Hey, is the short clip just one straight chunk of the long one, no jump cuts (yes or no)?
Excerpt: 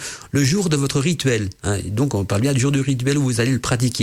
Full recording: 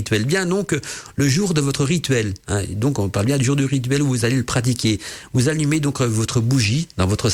yes